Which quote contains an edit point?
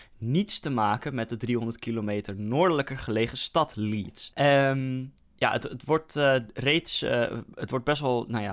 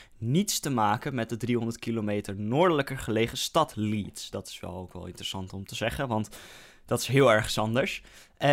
first; 1 cut; at 4.3 s

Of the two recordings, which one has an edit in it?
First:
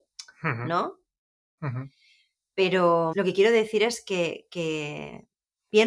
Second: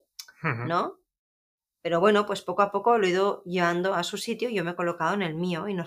first; 2 cuts; at 1.6 s, 3.1 s

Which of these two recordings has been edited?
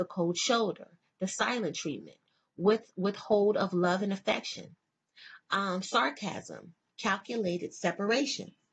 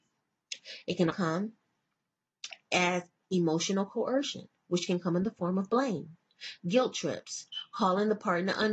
second; 1 cut; at 1.1 s

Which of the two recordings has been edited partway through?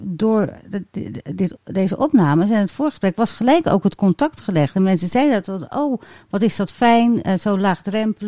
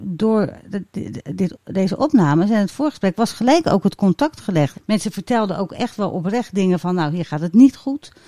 second; 1 cut; at 4.7 s

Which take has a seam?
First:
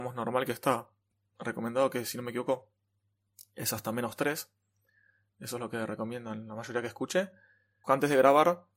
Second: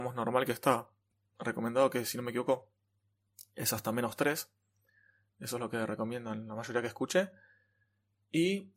first; 1 cut; at 7.8 s

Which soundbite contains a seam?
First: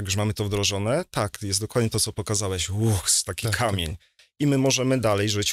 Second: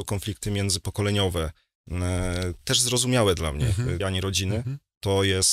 second; 1 cut; at 4.0 s

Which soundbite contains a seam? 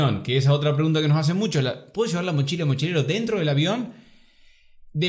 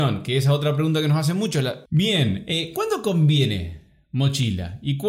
second; 1 cut; at 1.9 s

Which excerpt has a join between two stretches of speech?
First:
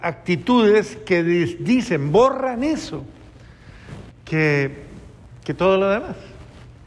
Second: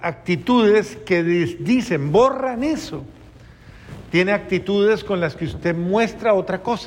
first; 1 cut; at 4.1 s

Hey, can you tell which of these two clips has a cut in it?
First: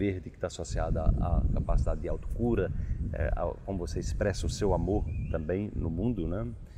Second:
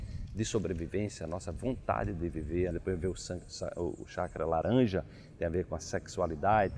second; 1 cut; at 2.7 s

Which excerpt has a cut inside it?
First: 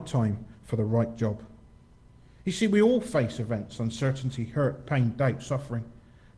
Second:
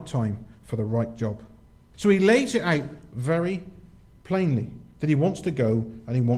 second; 1 cut; at 1.9 s

